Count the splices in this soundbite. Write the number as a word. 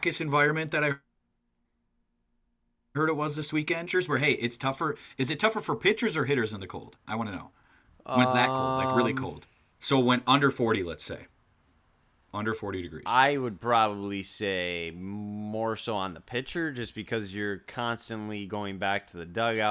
one